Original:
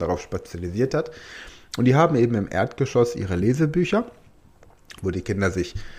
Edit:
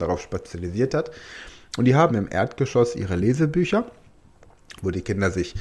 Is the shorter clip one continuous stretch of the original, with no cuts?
no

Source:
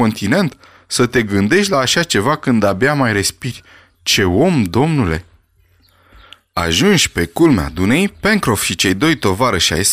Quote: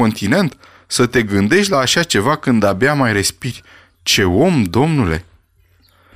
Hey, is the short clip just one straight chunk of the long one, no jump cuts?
yes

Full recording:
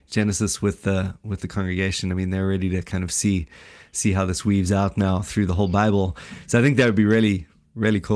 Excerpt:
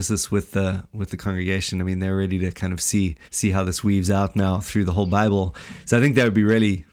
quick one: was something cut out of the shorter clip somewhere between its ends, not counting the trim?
yes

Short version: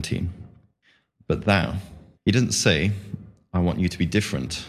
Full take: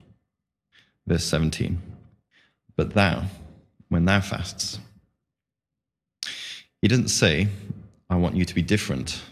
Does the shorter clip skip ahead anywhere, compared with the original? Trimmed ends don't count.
yes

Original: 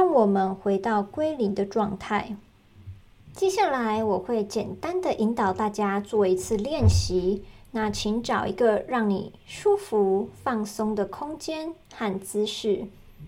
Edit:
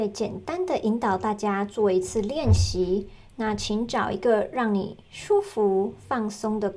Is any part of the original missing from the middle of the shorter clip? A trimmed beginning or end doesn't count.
no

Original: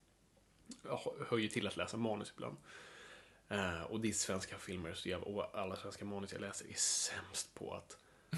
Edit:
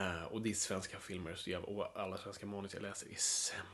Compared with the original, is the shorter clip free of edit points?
yes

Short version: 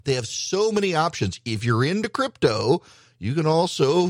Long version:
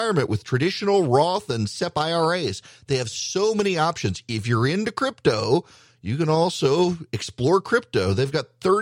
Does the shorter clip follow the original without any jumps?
yes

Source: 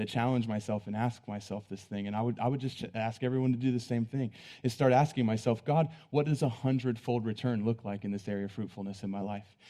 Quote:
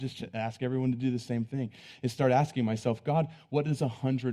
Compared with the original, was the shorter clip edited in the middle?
no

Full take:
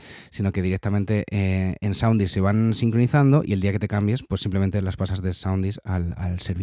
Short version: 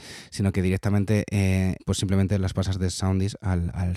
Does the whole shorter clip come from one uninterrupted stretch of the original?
no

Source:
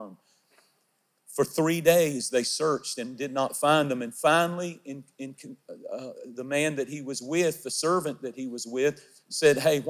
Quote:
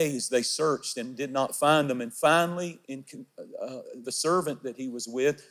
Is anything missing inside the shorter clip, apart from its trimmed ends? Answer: yes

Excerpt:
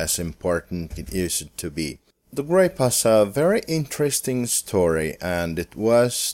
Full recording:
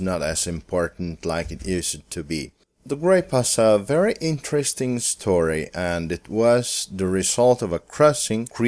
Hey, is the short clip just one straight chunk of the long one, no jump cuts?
no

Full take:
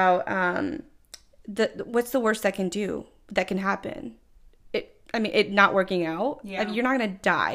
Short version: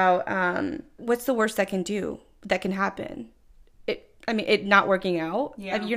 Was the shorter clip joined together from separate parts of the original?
yes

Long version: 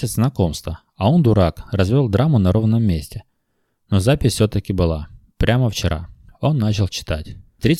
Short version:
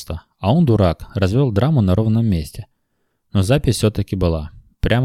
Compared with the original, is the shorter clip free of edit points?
yes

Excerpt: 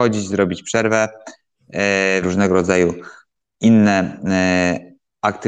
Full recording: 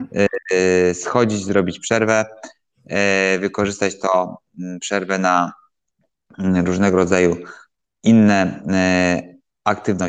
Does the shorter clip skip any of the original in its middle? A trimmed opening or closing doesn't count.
yes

